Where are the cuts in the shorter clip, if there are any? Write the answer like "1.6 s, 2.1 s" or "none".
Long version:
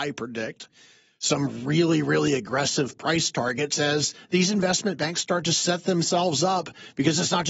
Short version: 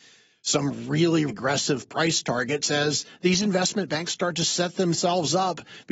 1.3 s